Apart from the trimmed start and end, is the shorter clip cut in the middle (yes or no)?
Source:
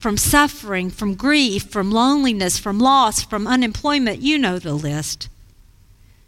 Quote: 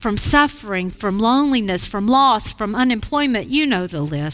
yes